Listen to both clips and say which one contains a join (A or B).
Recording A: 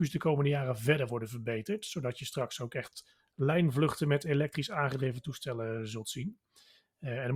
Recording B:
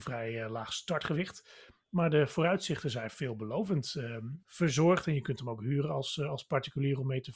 B